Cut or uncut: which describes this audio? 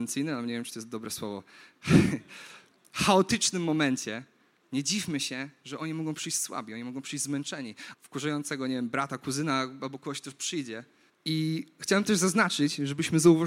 cut